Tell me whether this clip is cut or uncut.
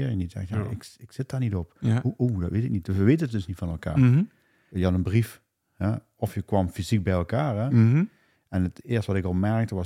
cut